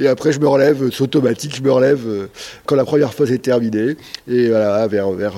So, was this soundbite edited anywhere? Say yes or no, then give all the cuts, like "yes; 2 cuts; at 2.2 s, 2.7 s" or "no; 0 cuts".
no; 0 cuts